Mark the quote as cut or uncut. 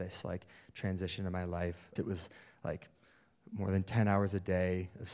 cut